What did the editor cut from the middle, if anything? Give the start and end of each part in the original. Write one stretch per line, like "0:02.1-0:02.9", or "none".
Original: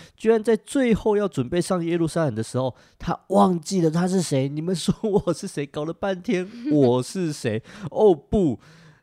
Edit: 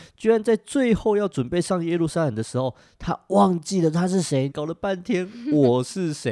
0:04.5-0:05.7